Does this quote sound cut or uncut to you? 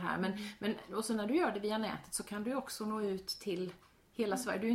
uncut